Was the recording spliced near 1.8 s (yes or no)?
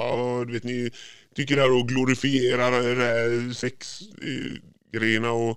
no